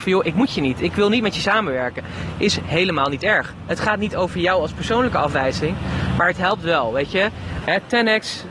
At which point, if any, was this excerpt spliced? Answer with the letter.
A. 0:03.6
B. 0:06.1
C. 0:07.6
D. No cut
C